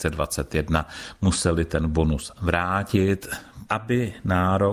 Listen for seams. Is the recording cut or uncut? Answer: cut